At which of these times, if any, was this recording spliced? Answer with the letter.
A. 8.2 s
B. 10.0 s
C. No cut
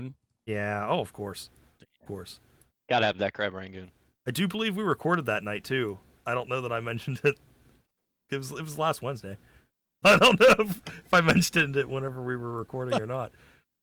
B